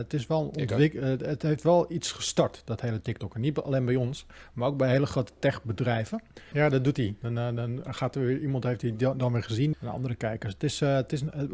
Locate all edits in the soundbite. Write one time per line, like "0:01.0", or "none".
0:06.5
0:09.7